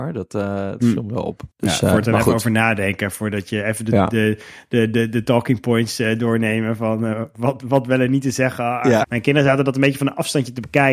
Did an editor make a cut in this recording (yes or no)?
yes